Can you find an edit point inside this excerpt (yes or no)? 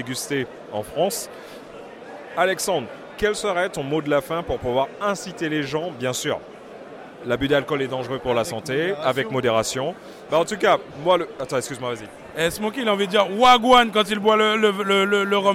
yes